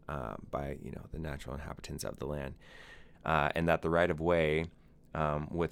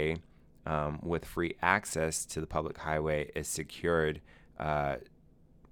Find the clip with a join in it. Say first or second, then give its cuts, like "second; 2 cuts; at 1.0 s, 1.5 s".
first; 1 cut; at 3.1 s